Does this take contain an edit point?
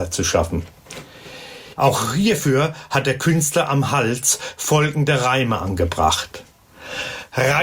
yes; 1 cut; at 1.8 s

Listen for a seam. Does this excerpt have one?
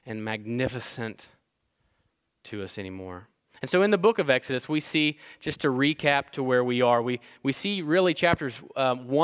no; 0 cuts

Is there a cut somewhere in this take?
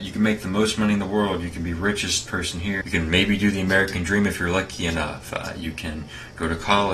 yes; 1 cut; at 2.8 s

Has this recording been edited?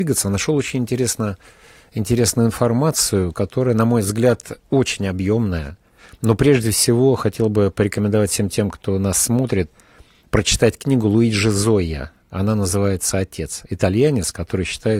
no; 0 cuts

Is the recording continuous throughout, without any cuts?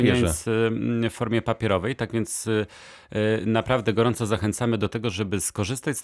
yes; 0 cuts

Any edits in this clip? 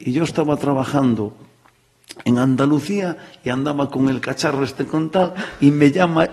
no; 0 cuts

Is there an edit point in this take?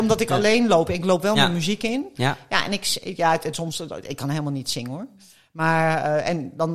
no; 0 cuts

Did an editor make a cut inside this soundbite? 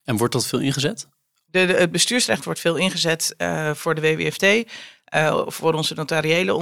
no; 0 cuts

